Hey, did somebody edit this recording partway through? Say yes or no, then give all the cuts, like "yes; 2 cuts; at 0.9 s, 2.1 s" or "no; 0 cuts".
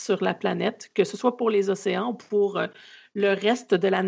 no; 0 cuts